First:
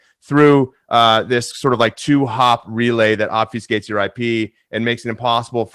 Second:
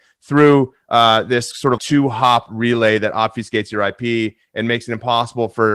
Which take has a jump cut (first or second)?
second